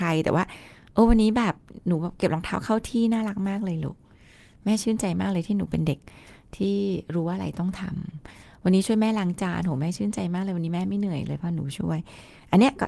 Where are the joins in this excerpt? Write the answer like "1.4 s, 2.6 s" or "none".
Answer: none